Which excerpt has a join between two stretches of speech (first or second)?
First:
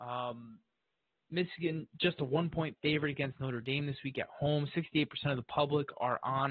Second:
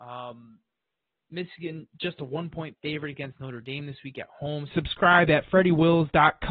second